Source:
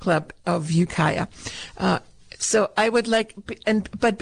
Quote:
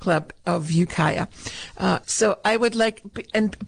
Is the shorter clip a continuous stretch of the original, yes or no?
no